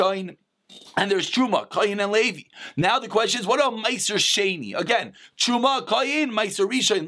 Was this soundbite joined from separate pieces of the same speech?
no; 0 cuts

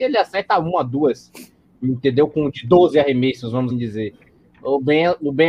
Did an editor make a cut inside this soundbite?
yes; 1 cut; at 3.7 s

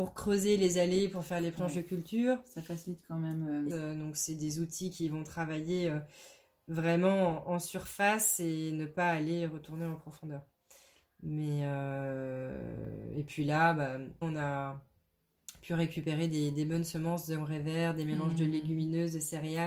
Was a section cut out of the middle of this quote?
yes; 2 cuts; at 3.7 s, 14.2 s

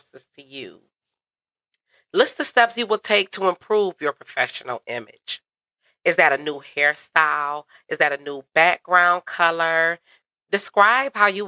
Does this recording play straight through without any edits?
yes; 0 cuts

